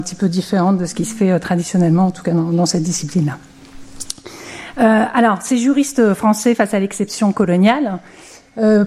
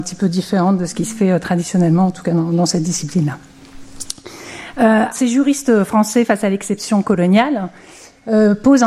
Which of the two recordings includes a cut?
second; 1 cut; at 5.1 s

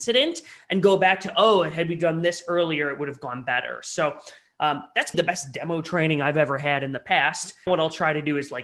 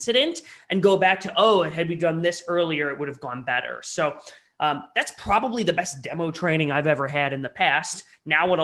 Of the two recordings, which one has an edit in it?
first; 2 cuts; at 5.1 s, 7.7 s

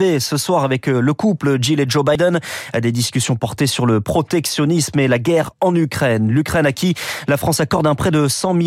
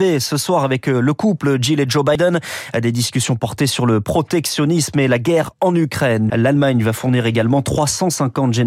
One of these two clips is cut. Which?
second; 1 cut; at 6.3 s

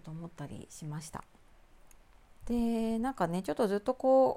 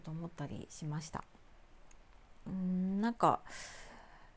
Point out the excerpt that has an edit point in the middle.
first; 1 cut; at 2.4 s

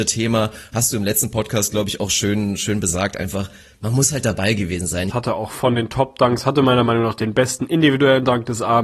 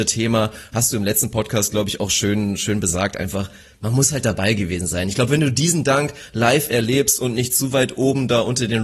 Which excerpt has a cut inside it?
first; 1 cut; at 5.1 s

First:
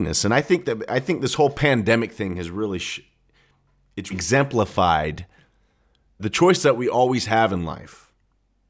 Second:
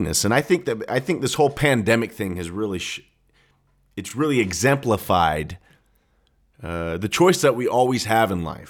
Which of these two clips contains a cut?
first; 2 cuts; at 4.1 s, 6.2 s

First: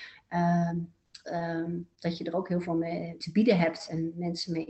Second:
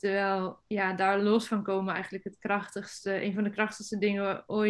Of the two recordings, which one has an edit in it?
first; 2 cuts; at 1.2 s, 3.2 s

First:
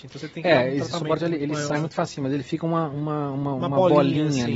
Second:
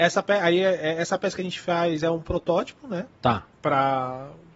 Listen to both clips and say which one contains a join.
second; 1 cut; at 3.5 s

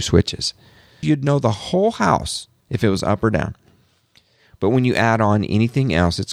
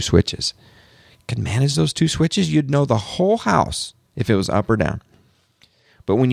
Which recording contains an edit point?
first; 1 cut; at 1.0 s

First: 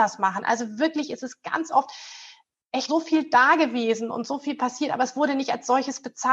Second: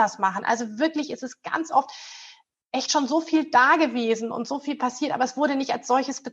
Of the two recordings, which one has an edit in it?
first; 1 cut; at 2.9 s

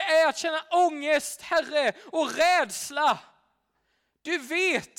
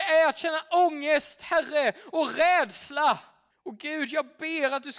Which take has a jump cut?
second; 1 cut; at 3.5 s

